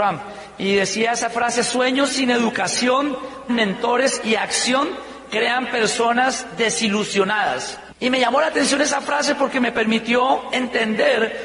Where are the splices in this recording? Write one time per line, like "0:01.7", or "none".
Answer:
0:03.5
0:07.9